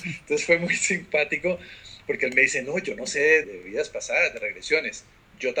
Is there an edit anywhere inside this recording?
yes; 1 cut; at 3.4 s

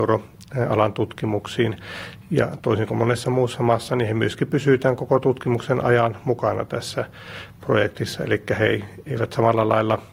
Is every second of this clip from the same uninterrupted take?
yes; 0 cuts

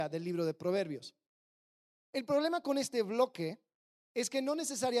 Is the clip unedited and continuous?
yes; 0 cuts

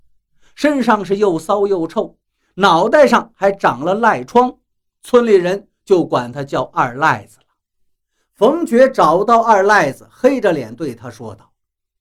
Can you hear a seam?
no; 0 cuts

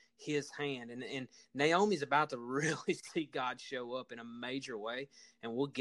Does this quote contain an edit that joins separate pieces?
no; 0 cuts

